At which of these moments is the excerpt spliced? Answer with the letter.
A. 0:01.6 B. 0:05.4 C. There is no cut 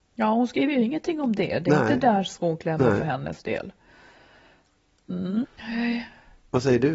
B